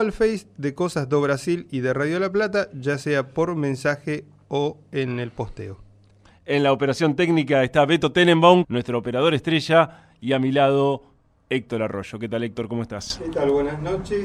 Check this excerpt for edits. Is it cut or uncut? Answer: cut